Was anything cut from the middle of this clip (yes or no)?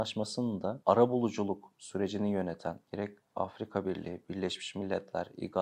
yes